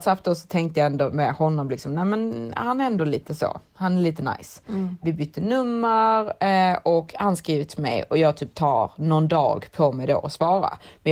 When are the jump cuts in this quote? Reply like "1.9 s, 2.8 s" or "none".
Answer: none